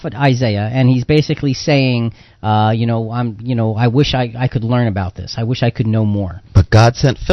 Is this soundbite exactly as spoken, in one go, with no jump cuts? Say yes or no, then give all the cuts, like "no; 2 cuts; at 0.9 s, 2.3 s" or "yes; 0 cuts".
yes; 0 cuts